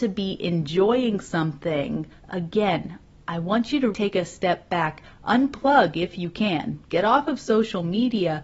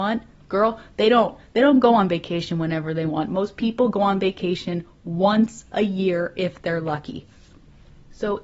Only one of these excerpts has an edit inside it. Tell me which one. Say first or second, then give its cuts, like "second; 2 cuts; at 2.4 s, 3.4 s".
first; 2 cuts; at 2.2 s, 3.9 s